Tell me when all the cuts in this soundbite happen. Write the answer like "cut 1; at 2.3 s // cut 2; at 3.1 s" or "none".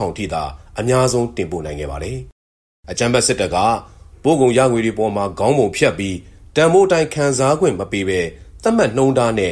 none

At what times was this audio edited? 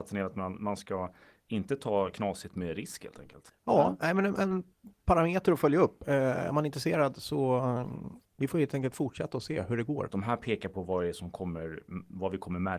cut 1; at 8.3 s // cut 2; at 10.1 s

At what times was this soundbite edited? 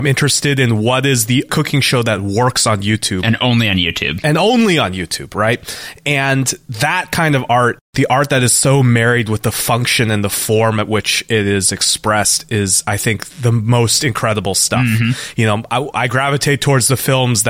none

